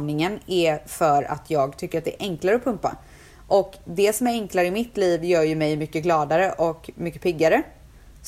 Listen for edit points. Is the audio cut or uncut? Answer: uncut